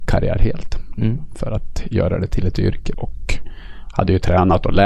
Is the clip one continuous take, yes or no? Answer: no